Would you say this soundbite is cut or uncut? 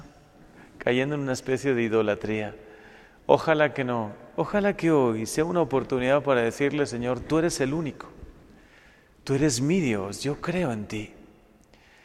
uncut